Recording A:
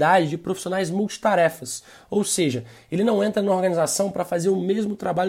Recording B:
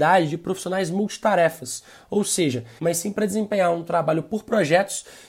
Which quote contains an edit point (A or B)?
B